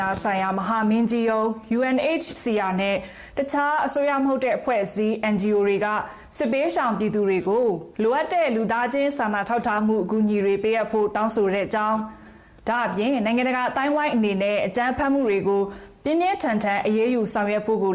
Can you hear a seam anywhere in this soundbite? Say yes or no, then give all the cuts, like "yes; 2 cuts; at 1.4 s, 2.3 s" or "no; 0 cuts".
yes; 1 cut; at 7.9 s